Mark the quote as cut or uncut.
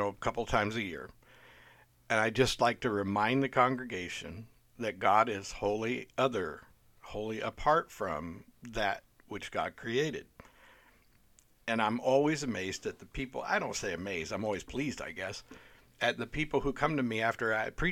uncut